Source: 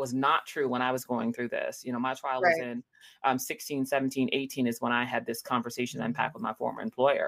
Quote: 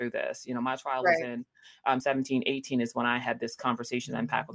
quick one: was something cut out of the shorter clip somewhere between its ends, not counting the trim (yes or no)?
yes